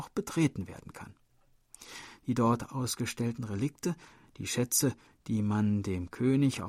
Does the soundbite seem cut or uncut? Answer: uncut